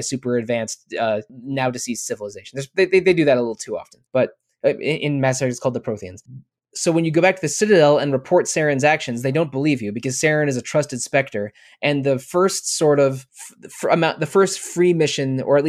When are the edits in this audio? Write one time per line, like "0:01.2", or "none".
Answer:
0:04.1